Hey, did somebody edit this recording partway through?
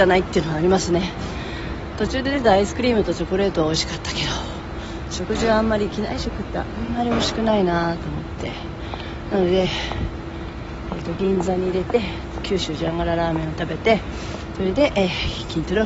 no; 0 cuts

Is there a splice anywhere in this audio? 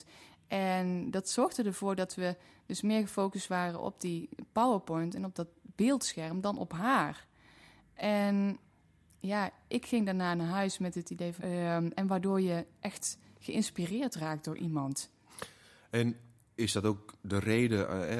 yes; 1 cut; at 11.4 s

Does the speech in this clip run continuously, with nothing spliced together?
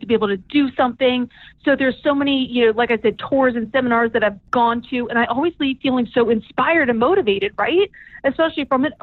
yes; 0 cuts

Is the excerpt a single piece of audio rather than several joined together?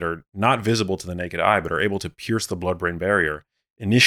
yes; 0 cuts

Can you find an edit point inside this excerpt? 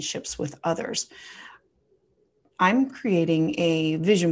no; 0 cuts

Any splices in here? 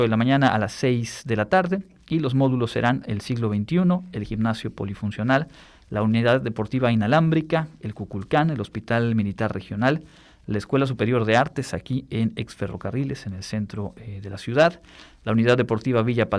no; 0 cuts

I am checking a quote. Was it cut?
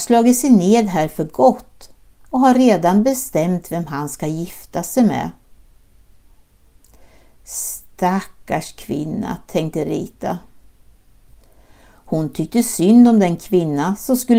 no; 0 cuts

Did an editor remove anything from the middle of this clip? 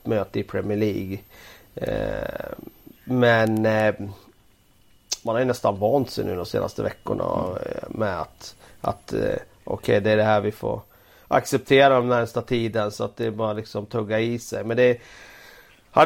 no; 0 cuts

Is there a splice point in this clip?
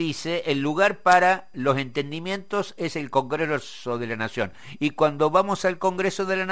no; 0 cuts

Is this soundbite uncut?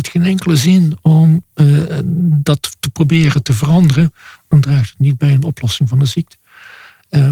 yes; 0 cuts

